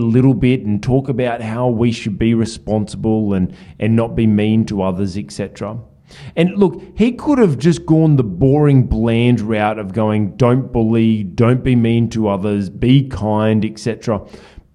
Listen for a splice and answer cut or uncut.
uncut